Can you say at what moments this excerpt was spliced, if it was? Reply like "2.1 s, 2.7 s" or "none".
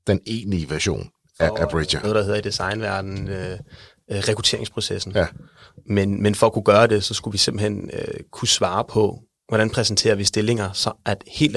2.0 s